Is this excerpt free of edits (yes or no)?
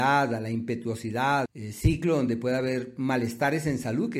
no